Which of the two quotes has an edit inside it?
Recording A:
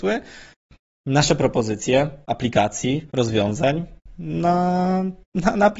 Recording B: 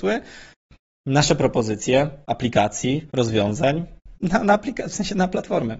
B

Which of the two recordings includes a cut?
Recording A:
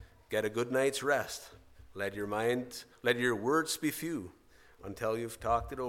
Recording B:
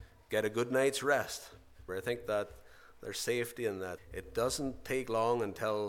B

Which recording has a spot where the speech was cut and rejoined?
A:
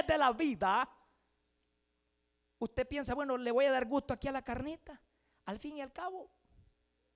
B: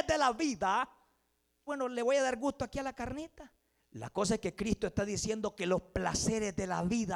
B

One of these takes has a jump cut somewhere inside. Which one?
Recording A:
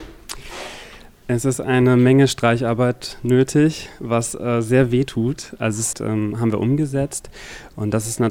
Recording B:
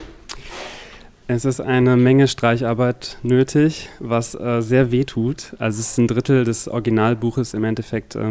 A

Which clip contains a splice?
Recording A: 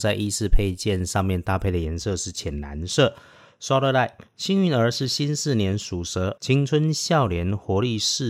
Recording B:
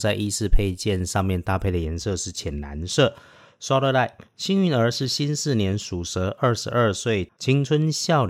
A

